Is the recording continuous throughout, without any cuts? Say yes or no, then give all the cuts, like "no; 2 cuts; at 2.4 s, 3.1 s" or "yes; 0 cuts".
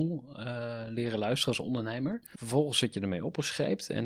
no; 1 cut; at 2.3 s